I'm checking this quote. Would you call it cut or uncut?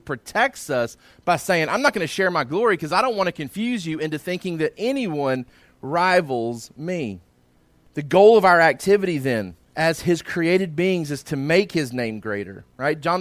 uncut